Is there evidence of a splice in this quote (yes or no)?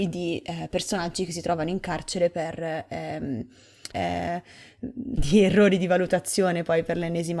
yes